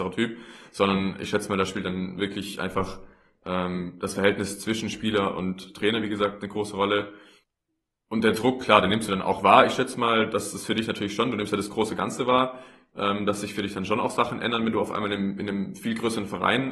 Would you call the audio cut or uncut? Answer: uncut